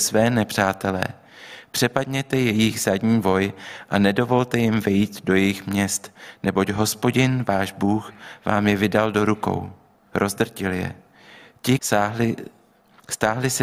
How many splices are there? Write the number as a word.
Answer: two